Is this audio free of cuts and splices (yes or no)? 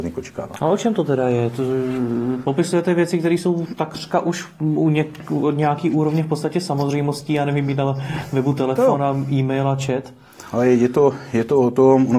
yes